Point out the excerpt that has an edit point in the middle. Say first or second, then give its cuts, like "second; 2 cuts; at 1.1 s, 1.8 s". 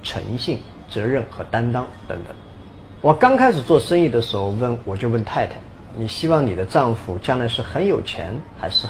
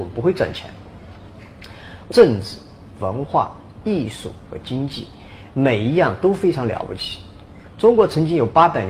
second; 1 cut; at 2.1 s